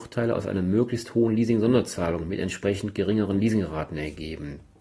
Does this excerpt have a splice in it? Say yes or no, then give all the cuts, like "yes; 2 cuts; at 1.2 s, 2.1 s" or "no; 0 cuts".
no; 0 cuts